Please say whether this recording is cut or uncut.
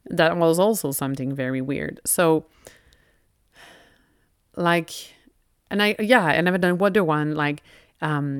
uncut